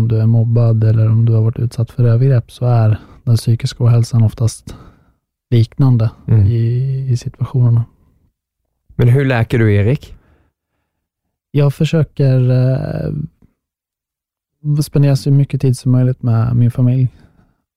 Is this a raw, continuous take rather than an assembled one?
yes; 0 cuts

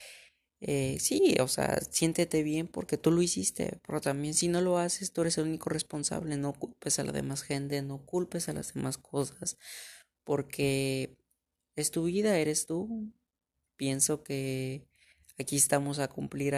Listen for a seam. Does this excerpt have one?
no; 0 cuts

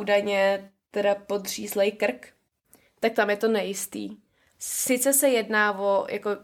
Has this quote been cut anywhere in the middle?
yes; 2 cuts; at 2.9 s, 4.5 s

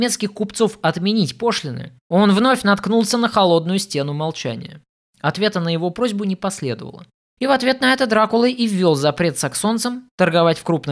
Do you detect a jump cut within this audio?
yes; 1 cut; at 7.4 s

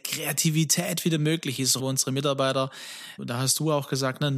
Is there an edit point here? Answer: yes; 2 cuts; at 1.8 s, 3.2 s

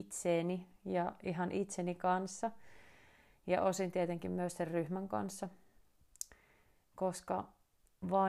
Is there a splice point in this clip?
no; 0 cuts

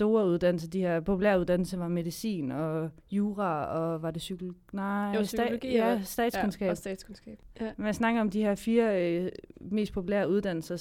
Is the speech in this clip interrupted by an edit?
yes; 1 cut; at 3.0 s

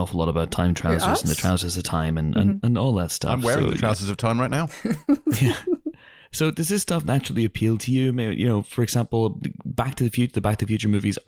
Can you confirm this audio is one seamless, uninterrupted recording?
yes; 0 cuts

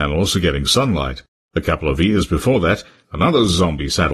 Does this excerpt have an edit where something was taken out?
yes; 1 cut; at 3.0 s

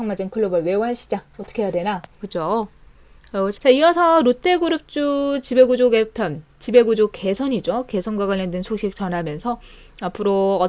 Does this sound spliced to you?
yes; 2 cuts; at 2.2 s, 3.6 s

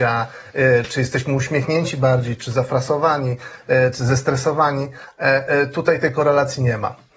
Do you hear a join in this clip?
yes; 1 cut; at 2.4 s

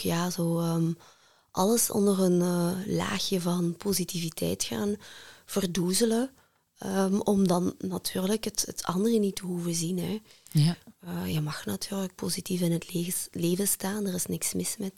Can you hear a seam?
no; 0 cuts

